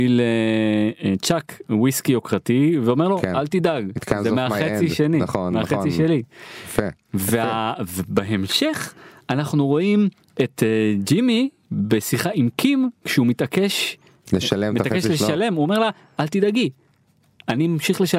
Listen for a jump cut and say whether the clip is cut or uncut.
uncut